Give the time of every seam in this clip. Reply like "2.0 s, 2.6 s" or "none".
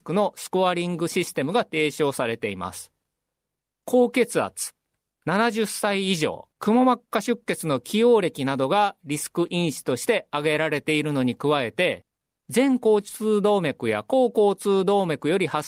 6.5 s